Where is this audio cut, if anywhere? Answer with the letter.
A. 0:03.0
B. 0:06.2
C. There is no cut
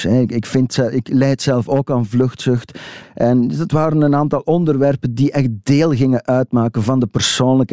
A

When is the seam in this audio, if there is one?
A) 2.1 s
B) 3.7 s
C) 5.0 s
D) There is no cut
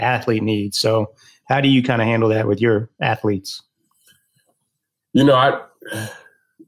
D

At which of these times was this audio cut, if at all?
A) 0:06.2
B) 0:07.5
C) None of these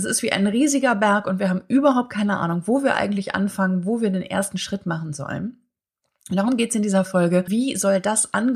B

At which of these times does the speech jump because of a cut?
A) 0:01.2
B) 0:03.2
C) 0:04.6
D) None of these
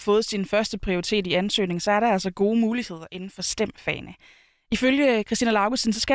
D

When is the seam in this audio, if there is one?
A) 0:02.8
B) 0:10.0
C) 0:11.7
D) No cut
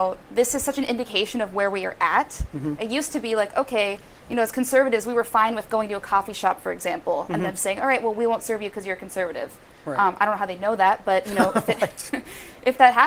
A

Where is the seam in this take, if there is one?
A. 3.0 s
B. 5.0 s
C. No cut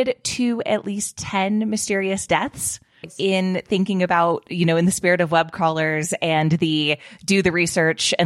A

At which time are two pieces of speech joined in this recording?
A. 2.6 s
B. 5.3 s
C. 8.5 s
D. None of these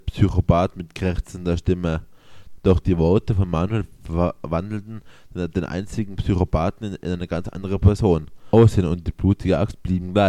D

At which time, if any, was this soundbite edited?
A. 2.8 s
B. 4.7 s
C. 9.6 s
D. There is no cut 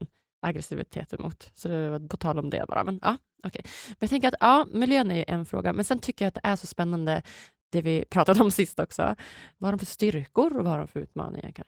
C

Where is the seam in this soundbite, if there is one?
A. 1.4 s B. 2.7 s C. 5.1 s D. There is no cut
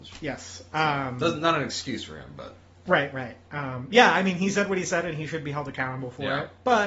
D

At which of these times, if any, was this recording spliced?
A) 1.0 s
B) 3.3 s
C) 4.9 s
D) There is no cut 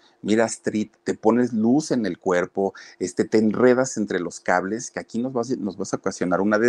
A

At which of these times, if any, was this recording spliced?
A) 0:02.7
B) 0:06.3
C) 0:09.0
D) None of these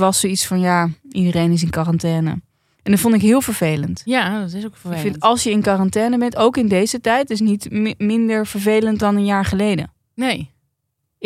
C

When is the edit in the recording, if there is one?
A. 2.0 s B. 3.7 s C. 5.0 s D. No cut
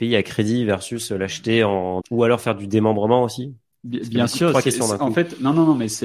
A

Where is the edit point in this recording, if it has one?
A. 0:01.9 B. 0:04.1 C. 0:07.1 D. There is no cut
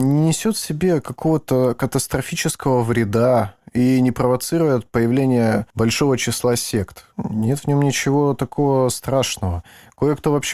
C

